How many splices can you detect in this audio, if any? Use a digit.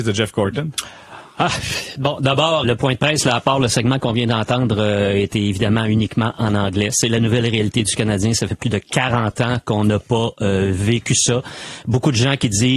1